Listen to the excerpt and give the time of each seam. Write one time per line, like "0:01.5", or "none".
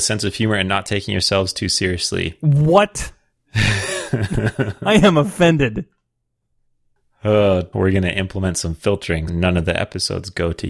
0:07.7
0:09.3